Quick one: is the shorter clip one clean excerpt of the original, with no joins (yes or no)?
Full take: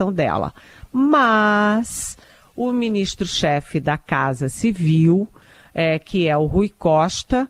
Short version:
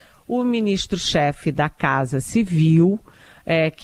yes